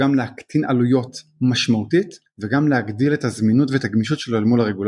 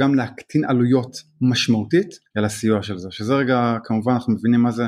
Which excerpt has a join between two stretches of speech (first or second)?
second